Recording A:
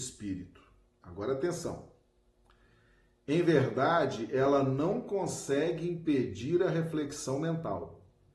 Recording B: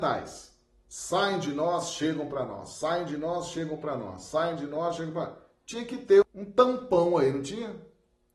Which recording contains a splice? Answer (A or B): B